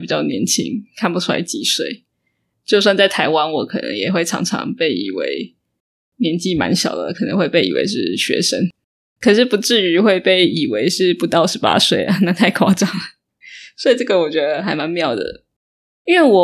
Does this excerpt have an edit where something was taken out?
no; 0 cuts

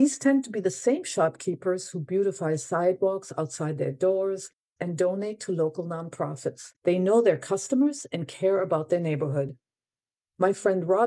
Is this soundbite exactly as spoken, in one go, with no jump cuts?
no; 2 cuts; at 4.8 s, 6.8 s

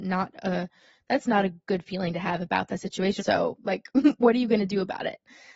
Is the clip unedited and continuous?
no; 1 cut; at 3.2 s

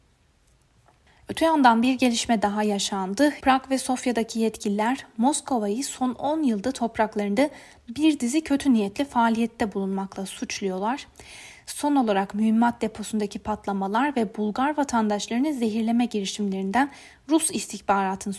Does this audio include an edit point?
yes; 1 cut; at 3.4 s

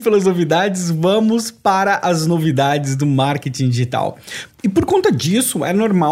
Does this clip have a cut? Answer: yes; 1 cut; at 4.5 s

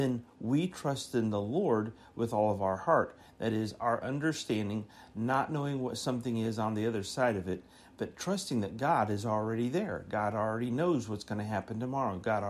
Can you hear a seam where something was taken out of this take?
no; 0 cuts

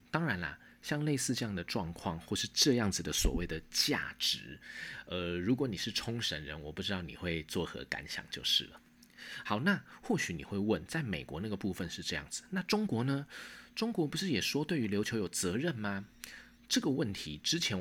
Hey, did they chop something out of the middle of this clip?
no; 0 cuts

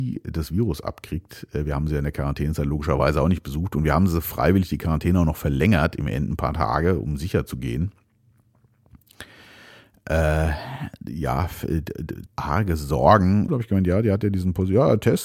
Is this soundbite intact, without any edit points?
no; 2 cuts; at 12.3 s, 13.5 s

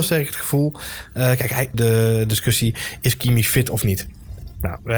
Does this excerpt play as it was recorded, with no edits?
no; 1 cut; at 1.7 s

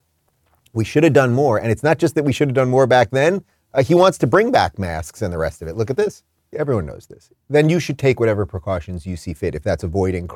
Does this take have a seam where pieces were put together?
yes; 1 cut; at 6.5 s

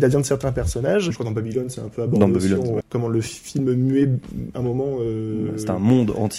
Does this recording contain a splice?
yes; 2 cuts; at 1.1 s, 2.8 s

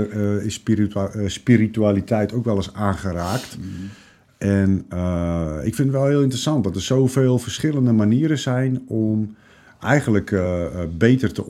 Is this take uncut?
yes; 0 cuts

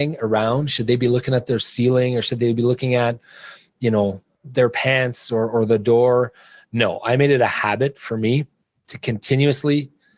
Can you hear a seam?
no; 0 cuts

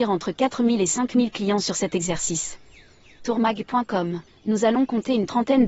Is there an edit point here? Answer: yes; 2 cuts; at 3.2 s, 4.3 s

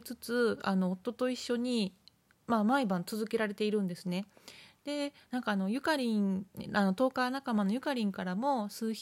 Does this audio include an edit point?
no; 0 cuts

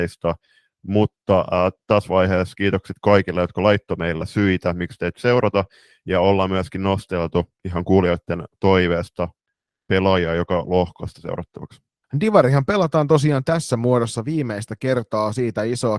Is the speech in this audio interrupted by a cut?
yes; 1 cut; at 4.2 s

